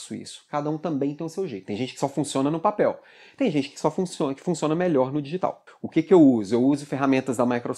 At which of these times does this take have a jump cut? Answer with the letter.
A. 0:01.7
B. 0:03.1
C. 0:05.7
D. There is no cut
C